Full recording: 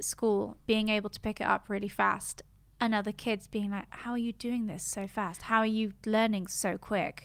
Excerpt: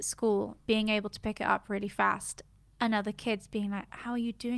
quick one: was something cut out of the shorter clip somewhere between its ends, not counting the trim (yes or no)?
no